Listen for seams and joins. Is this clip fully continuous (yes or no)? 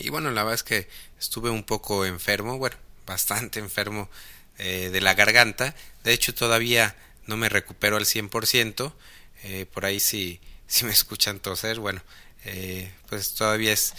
yes